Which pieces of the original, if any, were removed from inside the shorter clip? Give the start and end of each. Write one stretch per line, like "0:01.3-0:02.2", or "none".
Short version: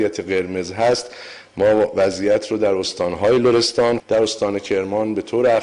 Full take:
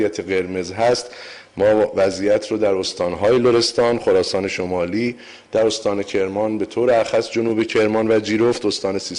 0:04.0-0:05.4